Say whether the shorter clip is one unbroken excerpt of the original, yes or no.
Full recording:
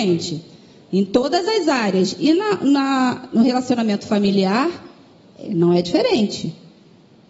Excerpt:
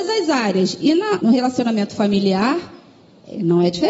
no